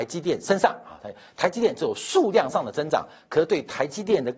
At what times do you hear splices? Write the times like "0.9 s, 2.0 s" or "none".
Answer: none